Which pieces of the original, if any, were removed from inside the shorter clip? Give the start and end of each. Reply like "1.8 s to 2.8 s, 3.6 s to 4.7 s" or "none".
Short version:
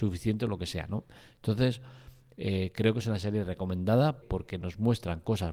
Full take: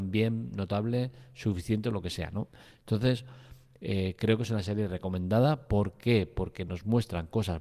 5.7 s to 6.3 s

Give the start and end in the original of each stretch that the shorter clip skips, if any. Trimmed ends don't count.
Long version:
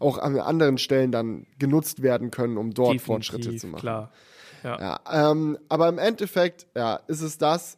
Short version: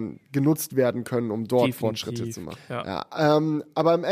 3.8 s to 4.5 s

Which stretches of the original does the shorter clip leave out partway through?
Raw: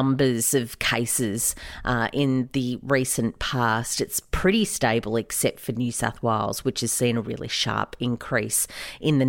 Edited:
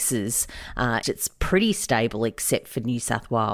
2.1 s to 4.0 s

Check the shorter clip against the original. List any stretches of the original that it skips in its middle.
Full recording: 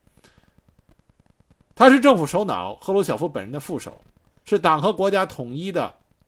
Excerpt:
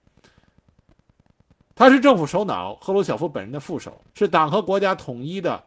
4.1 s to 4.4 s

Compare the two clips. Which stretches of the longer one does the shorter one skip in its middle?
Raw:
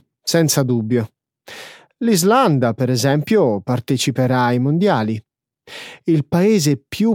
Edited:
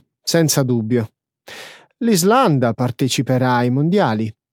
2.7 s to 3.6 s

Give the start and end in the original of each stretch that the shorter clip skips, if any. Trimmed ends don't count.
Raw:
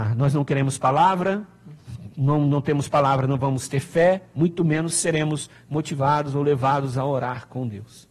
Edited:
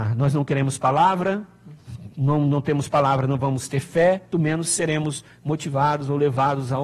4.3 s to 4.6 s

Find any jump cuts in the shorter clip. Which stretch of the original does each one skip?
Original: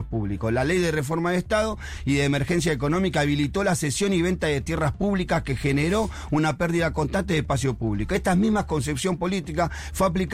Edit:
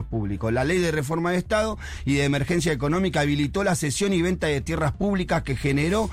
none

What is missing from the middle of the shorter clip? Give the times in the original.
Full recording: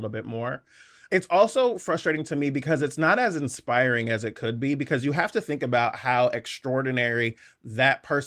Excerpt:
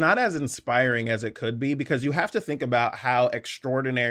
none

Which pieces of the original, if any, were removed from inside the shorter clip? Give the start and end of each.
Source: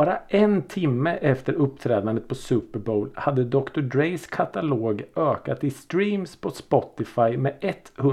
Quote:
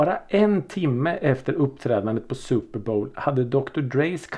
none

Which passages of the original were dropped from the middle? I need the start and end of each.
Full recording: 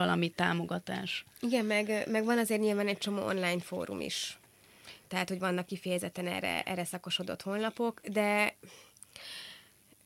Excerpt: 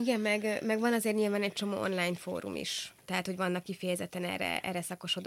4.5 s to 5.0 s

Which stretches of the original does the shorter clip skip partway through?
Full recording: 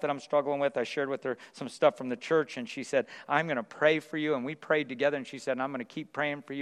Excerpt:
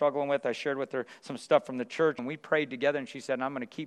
2.5 s to 4.4 s

